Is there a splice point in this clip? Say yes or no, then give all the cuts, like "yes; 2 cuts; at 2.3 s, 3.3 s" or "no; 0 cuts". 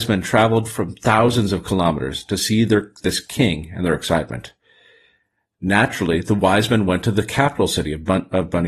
no; 0 cuts